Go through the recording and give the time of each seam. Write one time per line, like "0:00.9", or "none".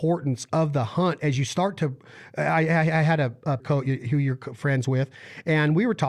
0:03.6